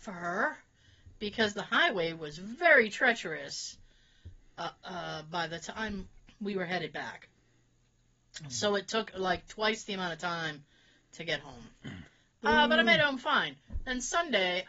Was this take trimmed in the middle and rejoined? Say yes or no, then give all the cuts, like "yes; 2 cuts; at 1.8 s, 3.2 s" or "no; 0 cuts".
no; 0 cuts